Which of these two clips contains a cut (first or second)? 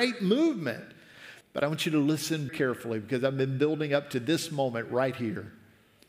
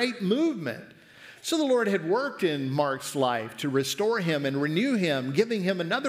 first